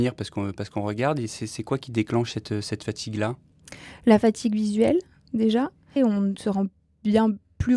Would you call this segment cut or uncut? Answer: cut